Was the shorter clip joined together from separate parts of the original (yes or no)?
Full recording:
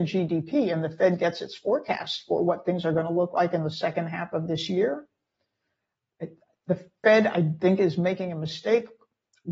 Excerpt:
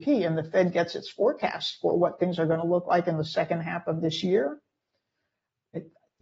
no